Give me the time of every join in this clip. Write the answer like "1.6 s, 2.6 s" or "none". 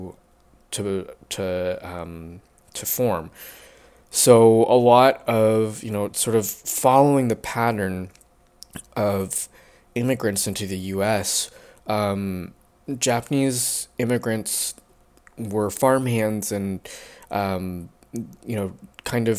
none